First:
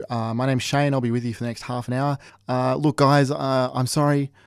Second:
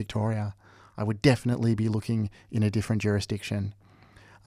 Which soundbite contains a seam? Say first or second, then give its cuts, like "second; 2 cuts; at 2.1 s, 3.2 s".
first; 1 cut; at 2.3 s